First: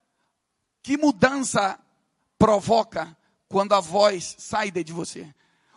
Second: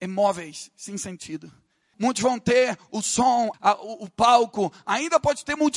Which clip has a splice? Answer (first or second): second